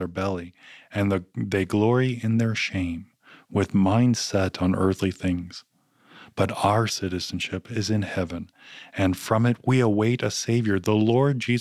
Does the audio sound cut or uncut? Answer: uncut